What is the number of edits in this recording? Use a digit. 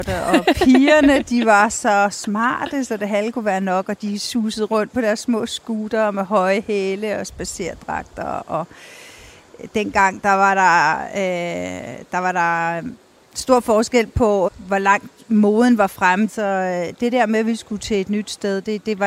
2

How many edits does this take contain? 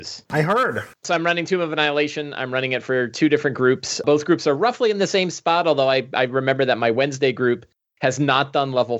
0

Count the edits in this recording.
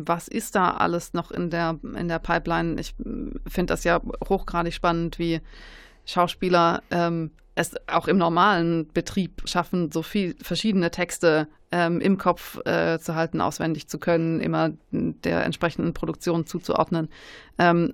1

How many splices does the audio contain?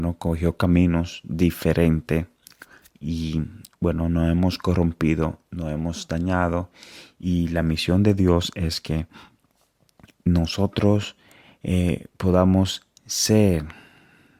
0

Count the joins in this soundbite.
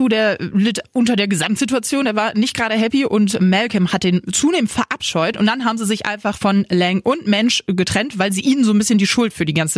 0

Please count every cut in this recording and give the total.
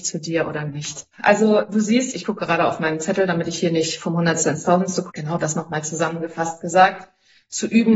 2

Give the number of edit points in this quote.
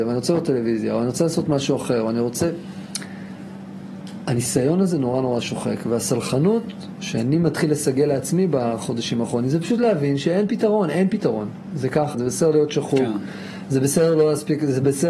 1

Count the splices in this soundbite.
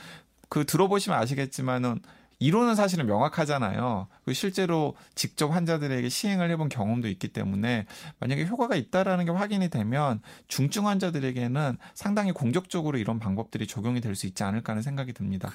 0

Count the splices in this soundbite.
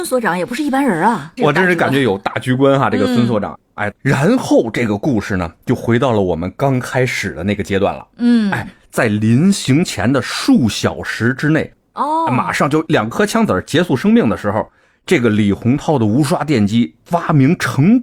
1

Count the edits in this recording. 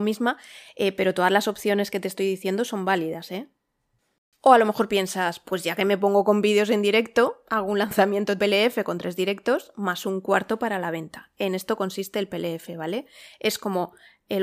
1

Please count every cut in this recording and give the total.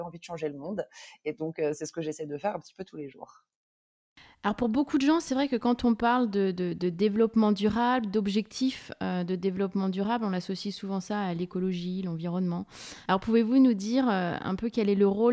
1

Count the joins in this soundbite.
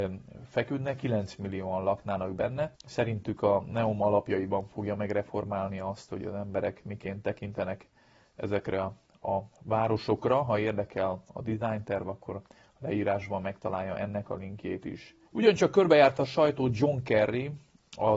2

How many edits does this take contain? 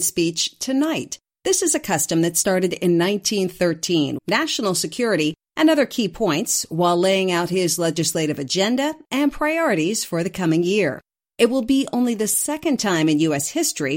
1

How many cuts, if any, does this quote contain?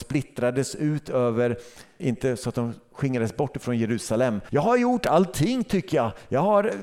2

